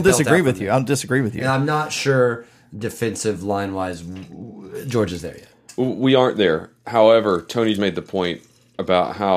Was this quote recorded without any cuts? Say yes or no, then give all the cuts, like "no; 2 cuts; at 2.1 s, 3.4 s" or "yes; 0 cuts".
no; 1 cut; at 7.7 s